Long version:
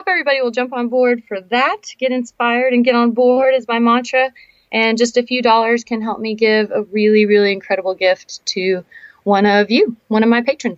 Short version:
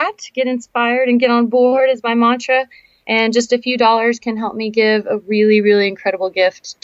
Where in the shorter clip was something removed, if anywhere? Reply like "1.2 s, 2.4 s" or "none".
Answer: none